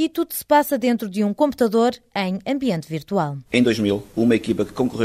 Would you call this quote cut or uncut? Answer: uncut